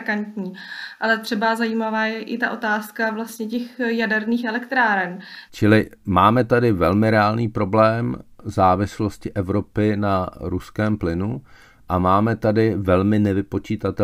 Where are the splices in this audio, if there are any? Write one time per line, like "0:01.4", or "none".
0:05.5